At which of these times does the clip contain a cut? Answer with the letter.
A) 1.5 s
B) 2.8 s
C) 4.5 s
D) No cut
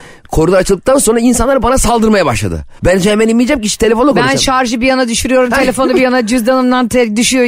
B